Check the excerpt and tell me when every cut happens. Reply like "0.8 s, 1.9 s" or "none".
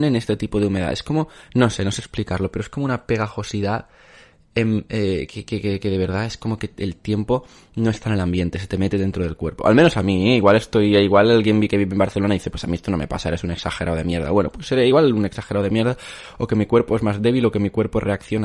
none